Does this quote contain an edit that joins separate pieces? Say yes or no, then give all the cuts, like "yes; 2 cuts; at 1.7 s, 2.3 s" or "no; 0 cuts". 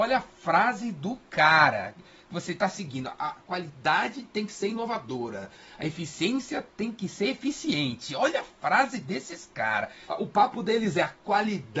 yes; 1 cut; at 10.1 s